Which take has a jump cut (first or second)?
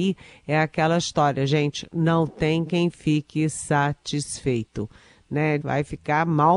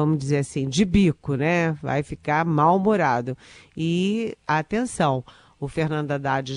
first